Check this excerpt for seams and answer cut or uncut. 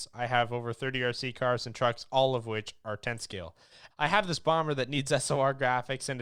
cut